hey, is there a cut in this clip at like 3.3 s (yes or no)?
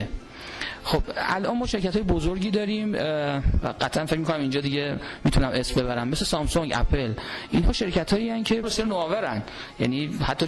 no